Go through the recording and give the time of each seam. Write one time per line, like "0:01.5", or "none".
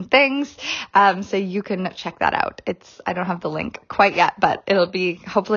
none